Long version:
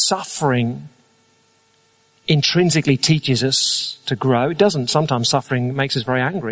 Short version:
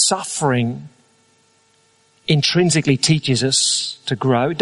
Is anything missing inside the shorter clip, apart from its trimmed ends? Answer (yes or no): no